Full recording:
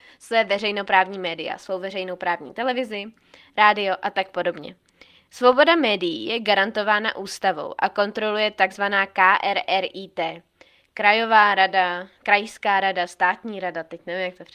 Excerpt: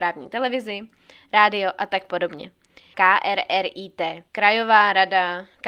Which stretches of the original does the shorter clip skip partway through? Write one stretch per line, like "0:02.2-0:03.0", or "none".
0:05.2-0:09.1
0:10.5-0:10.9